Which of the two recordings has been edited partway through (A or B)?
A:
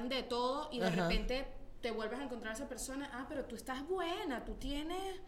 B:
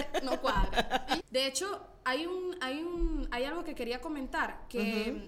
B